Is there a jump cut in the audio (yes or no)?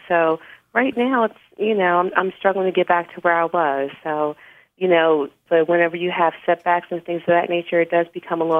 yes